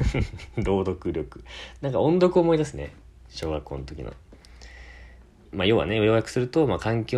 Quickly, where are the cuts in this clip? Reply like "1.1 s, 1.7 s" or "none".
5.5 s